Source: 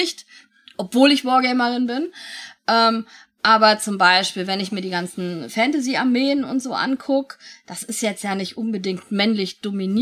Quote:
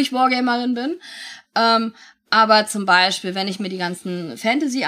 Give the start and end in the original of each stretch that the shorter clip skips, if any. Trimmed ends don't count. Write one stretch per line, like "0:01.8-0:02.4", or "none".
none